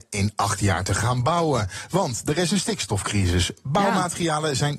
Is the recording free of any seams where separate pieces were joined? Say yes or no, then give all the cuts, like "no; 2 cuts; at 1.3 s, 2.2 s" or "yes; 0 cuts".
yes; 0 cuts